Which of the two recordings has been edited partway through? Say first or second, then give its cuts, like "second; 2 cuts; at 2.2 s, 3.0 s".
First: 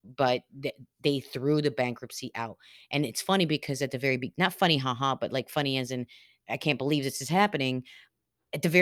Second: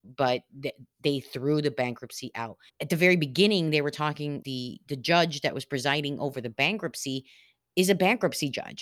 second; 2 cuts; at 2.7 s, 4.4 s